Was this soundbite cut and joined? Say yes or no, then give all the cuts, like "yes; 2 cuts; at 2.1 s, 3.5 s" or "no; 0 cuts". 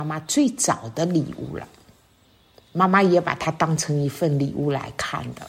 no; 0 cuts